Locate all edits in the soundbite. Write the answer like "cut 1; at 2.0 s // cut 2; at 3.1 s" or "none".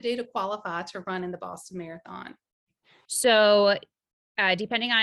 cut 1; at 3.0 s